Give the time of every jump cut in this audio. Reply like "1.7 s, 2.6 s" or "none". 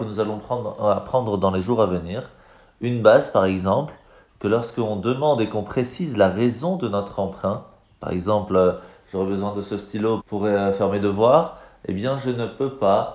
10.2 s